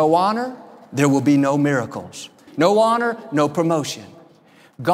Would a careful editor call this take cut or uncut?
cut